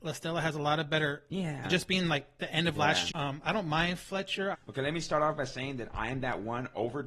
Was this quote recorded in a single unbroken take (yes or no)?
no